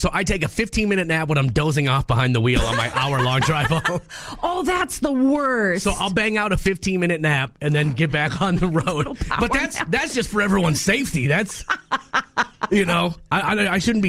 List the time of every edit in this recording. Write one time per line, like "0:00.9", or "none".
none